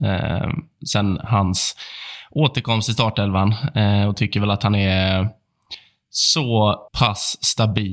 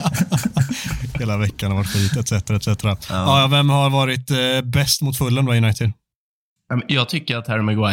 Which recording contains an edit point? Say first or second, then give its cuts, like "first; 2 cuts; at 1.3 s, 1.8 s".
first; 1 cut; at 6.9 s